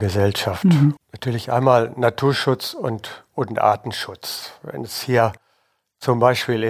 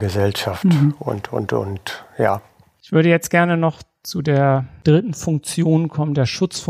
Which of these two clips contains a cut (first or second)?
first